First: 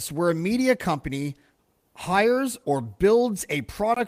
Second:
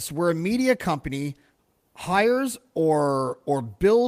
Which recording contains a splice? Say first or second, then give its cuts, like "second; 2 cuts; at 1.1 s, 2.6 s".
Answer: first; 1 cut; at 2.6 s